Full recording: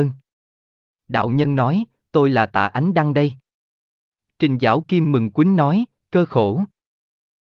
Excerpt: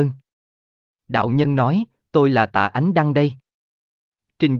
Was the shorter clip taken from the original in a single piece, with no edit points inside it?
yes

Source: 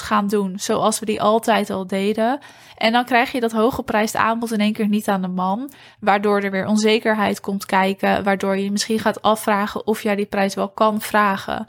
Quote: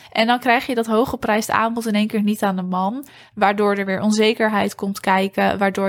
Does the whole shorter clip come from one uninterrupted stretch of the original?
yes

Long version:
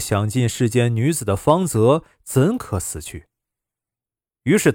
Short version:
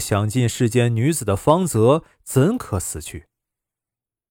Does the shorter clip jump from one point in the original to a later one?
no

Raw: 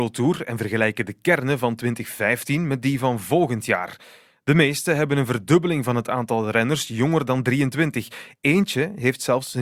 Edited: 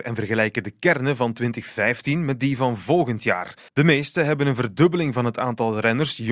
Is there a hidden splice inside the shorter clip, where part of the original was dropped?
yes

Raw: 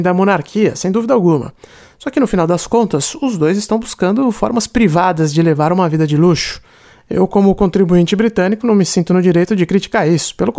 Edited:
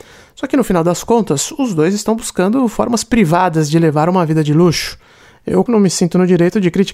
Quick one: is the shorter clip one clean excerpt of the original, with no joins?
no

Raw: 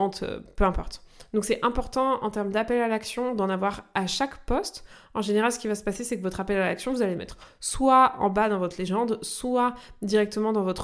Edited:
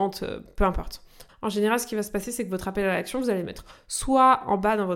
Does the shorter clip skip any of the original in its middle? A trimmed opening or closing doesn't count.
yes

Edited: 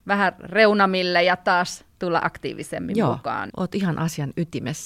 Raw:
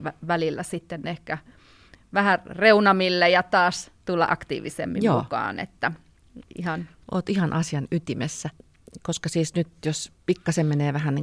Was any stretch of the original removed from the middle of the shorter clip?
yes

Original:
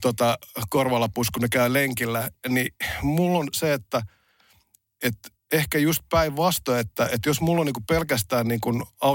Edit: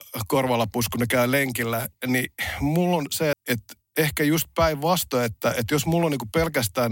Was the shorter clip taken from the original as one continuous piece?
no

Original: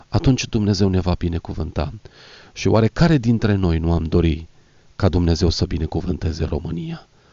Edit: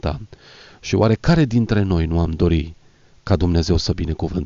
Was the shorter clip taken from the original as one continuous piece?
yes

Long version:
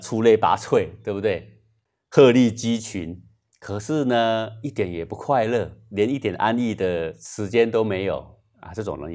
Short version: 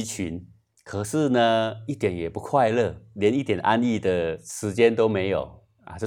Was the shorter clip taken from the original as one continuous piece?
yes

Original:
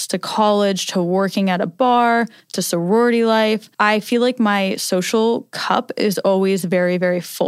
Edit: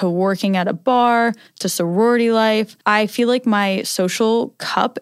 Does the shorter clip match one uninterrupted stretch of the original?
yes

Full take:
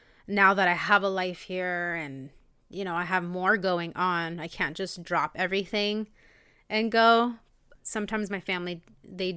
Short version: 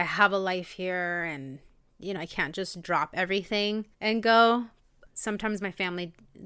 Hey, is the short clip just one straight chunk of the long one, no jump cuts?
no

